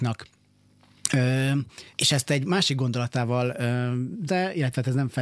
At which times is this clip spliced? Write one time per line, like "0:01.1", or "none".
0:01.9
0:04.3